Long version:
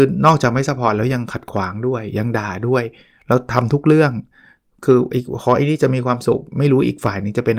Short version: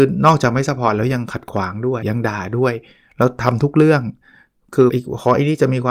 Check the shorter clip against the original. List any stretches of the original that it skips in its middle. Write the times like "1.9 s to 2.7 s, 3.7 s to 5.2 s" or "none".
2.0 s to 2.1 s, 5.0 s to 5.1 s